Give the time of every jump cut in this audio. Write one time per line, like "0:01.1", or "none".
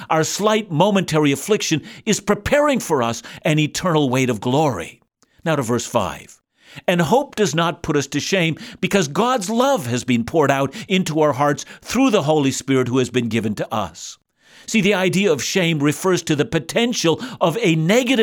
none